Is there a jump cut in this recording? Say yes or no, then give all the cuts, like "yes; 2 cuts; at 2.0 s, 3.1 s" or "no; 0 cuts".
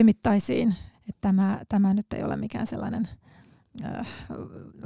yes; 1 cut; at 0.9 s